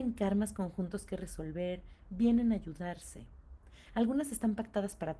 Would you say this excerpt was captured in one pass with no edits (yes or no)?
yes